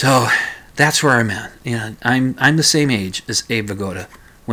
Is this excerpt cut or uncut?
uncut